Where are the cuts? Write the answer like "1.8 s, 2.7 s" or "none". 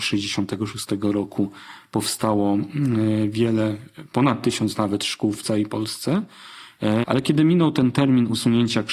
7.0 s

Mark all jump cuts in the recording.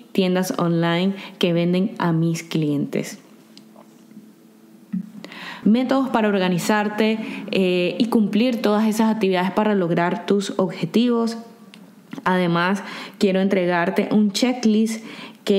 5.6 s

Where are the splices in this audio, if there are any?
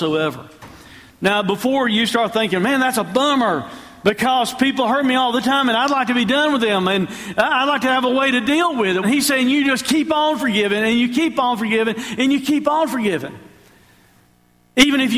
9.0 s

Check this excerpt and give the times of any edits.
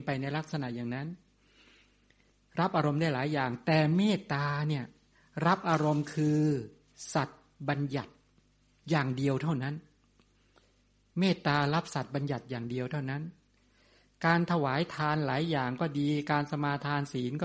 none

